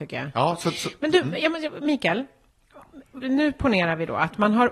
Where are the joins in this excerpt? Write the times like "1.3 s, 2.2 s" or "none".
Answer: 3.2 s